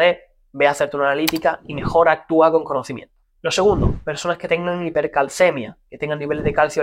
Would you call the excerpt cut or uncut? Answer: uncut